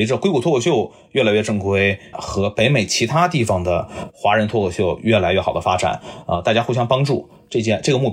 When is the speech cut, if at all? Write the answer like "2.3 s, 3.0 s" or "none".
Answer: 2.1 s